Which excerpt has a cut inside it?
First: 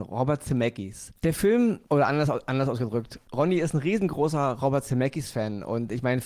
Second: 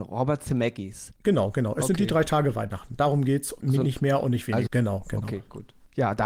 second; 3 cuts; at 1.2 s, 3.6 s, 4.7 s

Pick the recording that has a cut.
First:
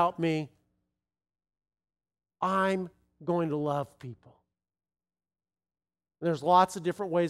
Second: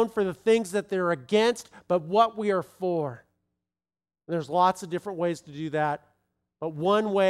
second; 1 cut; at 4.1 s

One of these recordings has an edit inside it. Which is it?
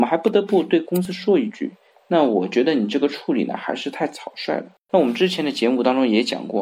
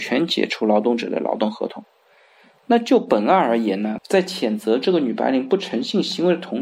first; 1 cut; at 4.8 s

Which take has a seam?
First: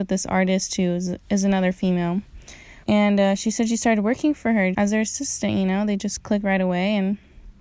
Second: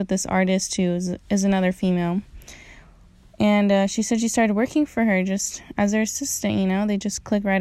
first; 2 cuts; at 2.8 s, 4.7 s

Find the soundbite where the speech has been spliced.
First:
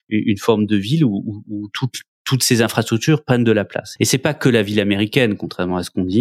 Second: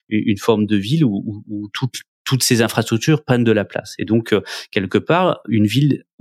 first; 1 cut; at 4.0 s

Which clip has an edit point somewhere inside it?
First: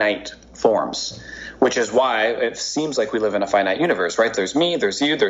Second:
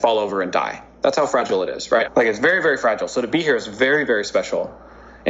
second; 1 cut; at 2.0 s

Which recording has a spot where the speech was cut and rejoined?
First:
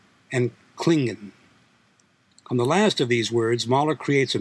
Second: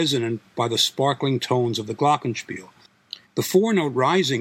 second; 1 cut; at 3.2 s

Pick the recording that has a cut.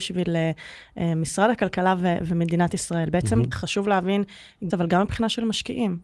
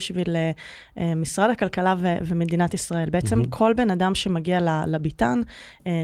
first; 2 cuts; at 3.5 s, 4.7 s

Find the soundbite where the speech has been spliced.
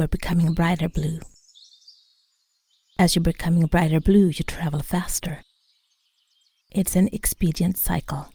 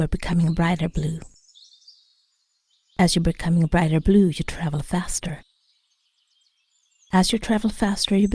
first; 1 cut; at 6.6 s

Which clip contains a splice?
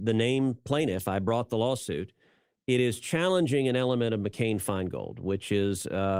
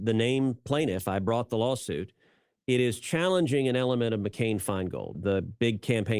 second; 1 cut; at 5.1 s

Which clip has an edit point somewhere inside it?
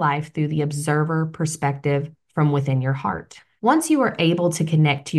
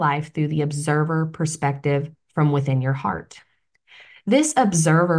first; 1 cut; at 3.6 s

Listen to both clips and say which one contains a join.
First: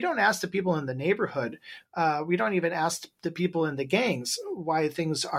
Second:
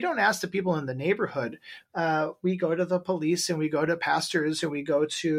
second; 1 cut; at 1.9 s

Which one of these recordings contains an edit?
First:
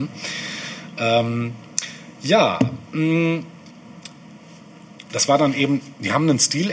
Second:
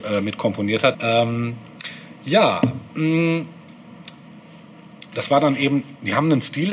second; 1 cut; at 0.9 s

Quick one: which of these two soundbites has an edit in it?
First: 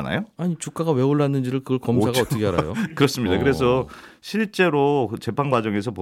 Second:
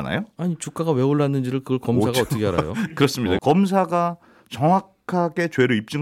second; 1 cut; at 3.4 s

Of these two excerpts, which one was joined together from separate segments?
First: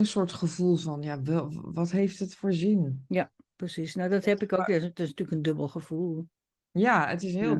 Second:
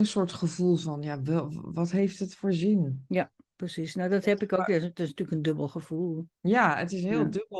second; 1 cut; at 6.3 s

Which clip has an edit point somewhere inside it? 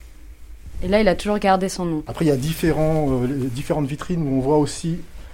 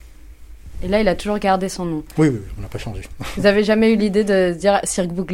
first; 1 cut; at 2.1 s

